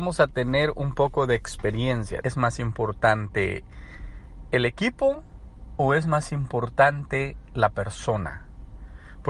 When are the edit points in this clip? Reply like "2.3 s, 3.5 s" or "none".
2.2 s